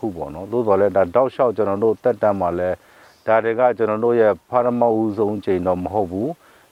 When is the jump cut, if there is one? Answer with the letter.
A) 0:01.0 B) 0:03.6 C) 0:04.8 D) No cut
D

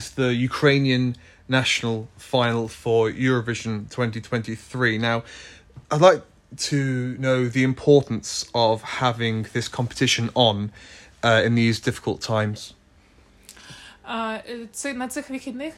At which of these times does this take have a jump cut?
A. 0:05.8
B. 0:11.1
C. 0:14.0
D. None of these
A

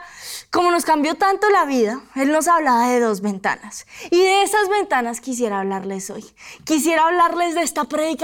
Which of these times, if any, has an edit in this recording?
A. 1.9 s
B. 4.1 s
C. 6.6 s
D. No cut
D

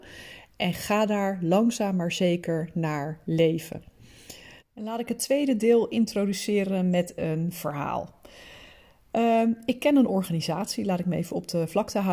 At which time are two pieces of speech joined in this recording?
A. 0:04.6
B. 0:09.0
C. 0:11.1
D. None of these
A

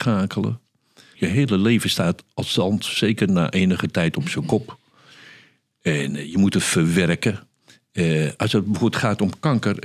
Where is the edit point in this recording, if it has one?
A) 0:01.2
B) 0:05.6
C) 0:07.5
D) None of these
A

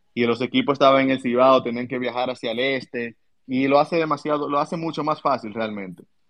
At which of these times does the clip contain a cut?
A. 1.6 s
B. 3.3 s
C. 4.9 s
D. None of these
B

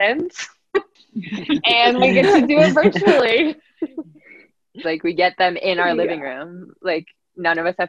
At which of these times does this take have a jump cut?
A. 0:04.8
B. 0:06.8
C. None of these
A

